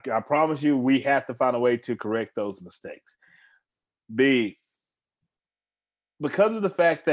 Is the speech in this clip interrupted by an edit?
no; 0 cuts

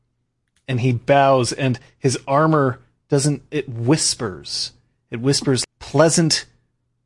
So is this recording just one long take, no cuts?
no; 1 cut; at 5.6 s

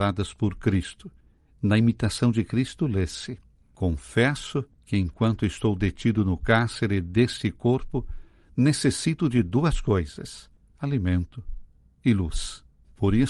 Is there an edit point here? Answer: no; 0 cuts

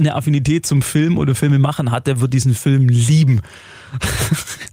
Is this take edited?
no; 0 cuts

